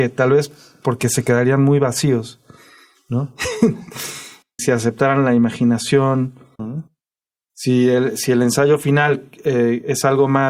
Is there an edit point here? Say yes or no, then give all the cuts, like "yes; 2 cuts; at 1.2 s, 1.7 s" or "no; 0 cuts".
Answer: yes; 2 cuts; at 4.6 s, 6.6 s